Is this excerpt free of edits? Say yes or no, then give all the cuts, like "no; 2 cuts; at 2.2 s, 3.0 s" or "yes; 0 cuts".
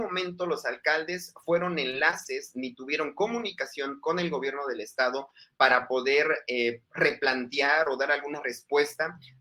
yes; 0 cuts